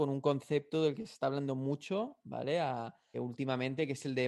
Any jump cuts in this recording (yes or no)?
yes